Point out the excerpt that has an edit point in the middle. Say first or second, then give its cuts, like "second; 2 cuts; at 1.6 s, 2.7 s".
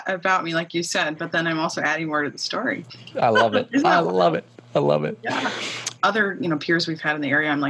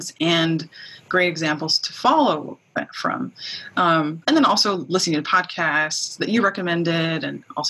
first; 1 cut; at 6.0 s